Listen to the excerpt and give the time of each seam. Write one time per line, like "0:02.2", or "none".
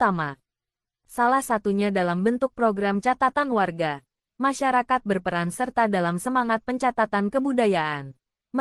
0:04.3